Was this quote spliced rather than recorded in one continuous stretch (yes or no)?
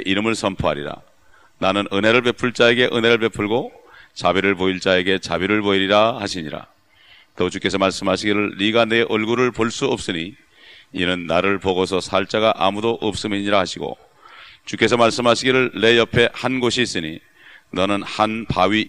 no